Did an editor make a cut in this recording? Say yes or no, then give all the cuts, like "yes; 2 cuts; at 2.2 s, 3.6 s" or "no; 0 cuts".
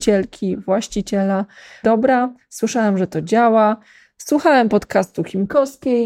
yes; 1 cut; at 1.8 s